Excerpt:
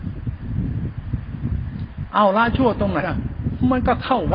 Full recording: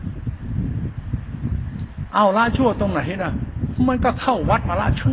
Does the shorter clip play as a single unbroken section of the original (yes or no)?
no